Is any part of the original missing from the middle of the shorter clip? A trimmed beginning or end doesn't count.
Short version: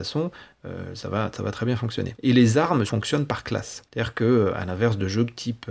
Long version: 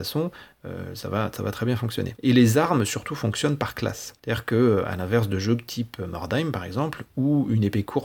yes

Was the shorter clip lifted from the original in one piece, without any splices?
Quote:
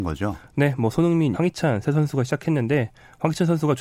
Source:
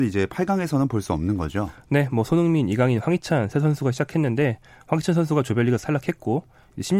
no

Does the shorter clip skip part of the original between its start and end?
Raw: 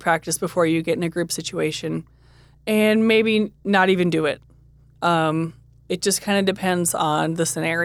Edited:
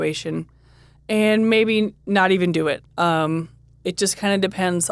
yes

